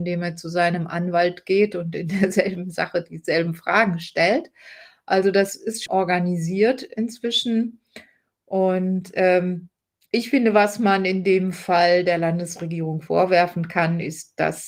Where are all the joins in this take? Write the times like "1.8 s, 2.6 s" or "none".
5.9 s